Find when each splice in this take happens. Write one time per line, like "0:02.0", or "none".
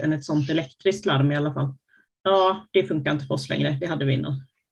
0:02.1